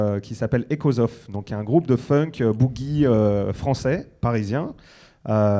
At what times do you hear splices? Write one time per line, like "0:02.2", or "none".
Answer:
none